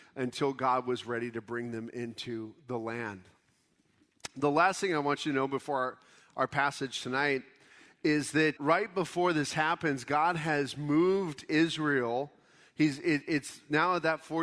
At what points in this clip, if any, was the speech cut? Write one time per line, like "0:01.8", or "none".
0:08.6